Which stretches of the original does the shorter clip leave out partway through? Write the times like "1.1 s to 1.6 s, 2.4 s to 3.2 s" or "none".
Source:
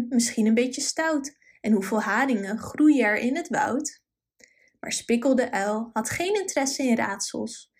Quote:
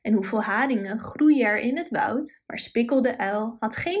4.0 s to 4.8 s